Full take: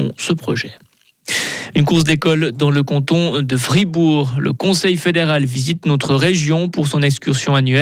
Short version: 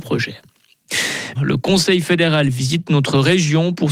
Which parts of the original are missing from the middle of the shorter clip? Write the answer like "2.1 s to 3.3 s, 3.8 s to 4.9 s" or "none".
1.7 s to 4.3 s